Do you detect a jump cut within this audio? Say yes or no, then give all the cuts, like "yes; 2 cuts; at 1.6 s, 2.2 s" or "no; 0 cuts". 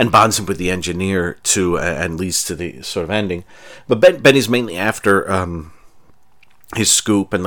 no; 0 cuts